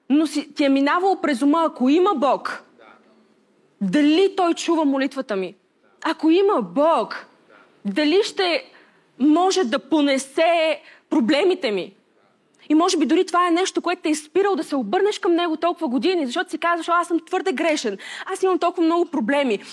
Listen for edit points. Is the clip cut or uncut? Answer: uncut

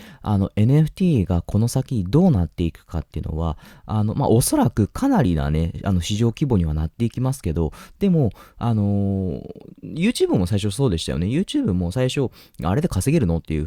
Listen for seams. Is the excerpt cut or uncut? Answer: uncut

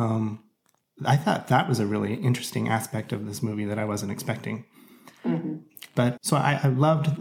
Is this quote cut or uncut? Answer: cut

